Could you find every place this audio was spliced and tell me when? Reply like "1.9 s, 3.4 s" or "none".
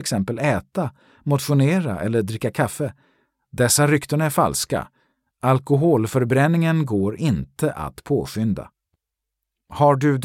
none